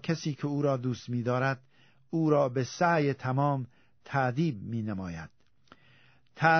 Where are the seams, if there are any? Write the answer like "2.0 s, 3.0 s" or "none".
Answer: none